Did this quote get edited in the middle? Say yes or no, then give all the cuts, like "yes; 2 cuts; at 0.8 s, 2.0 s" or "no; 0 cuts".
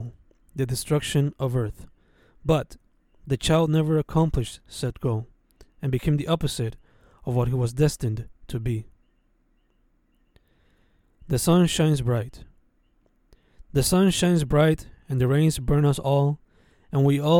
no; 0 cuts